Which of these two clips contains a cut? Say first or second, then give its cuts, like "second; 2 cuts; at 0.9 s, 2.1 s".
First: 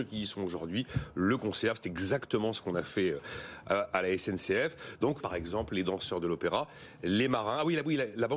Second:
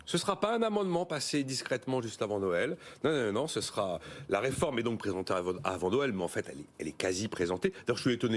first; 1 cut; at 5.2 s